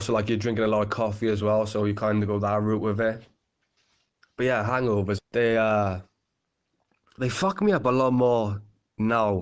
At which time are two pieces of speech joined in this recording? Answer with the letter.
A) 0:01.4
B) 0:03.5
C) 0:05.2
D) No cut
C